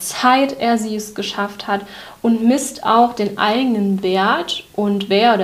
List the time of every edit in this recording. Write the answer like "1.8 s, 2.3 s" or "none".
none